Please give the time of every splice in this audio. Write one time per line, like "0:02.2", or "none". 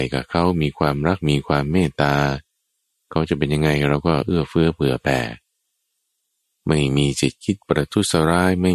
none